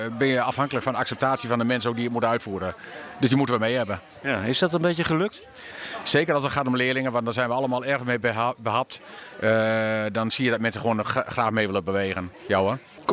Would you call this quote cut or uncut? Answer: uncut